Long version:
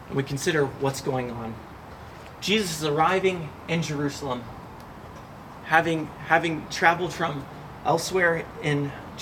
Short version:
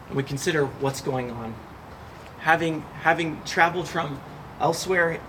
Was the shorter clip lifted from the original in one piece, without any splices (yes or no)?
no